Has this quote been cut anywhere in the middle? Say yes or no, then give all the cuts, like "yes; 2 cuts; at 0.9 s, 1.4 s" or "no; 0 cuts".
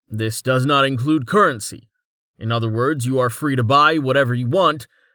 no; 0 cuts